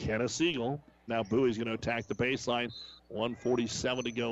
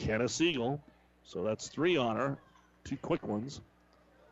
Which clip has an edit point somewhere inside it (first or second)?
first